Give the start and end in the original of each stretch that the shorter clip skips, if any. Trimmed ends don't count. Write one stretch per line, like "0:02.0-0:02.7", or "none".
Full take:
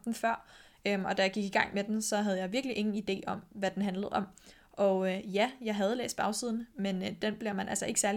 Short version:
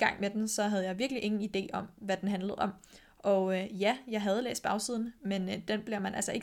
none